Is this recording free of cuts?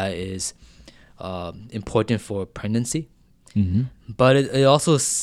yes; 0 cuts

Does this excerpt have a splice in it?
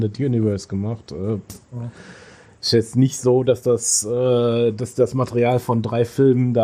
no; 0 cuts

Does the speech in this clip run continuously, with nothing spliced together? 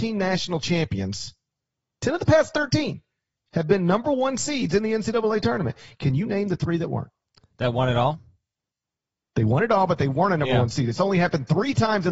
yes; 0 cuts

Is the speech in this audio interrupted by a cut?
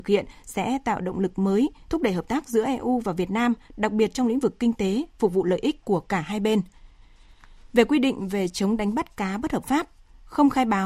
no; 0 cuts

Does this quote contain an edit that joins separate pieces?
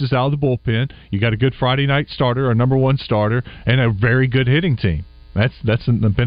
no; 0 cuts

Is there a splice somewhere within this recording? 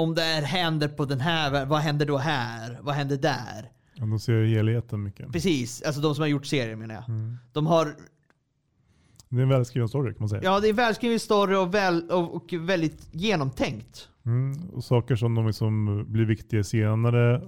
no; 0 cuts

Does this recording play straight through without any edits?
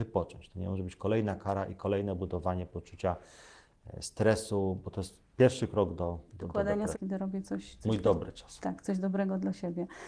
no; 1 cut; at 6.9 s

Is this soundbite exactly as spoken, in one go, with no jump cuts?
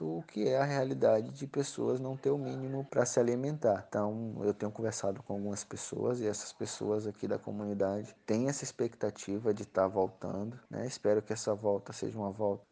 yes; 0 cuts

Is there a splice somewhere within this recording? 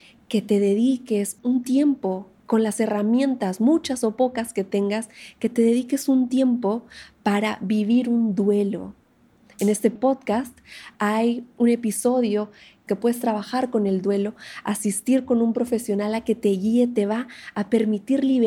yes; 1 cut; at 2.4 s

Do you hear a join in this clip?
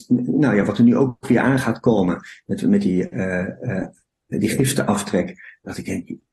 yes; 1 cut; at 4.3 s

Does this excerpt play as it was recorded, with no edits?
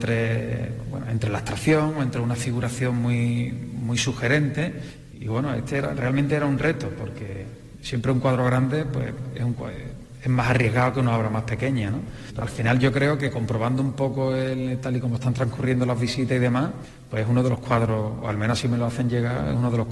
no; 1 cut; at 12.4 s

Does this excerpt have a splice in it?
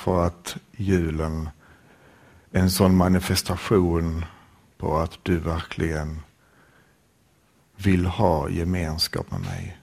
no; 0 cuts

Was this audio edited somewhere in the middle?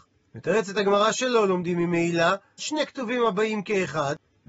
yes; 1 cut; at 2.6 s

